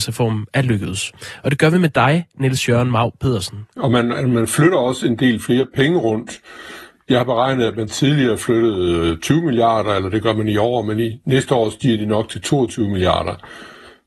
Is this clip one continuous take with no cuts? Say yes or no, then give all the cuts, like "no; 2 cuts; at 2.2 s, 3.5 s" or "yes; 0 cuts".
no; 1 cut; at 3.7 s